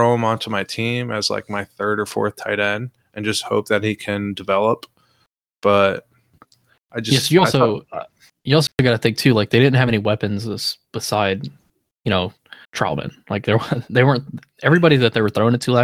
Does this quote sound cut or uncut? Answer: cut